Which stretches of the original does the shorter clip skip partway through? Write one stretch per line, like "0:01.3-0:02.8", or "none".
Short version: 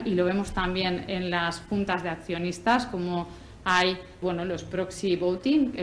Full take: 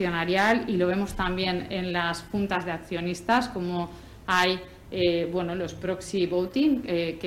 0:04.8-0:05.3